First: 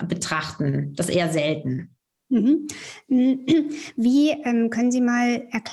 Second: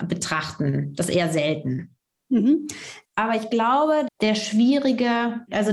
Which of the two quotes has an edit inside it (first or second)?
second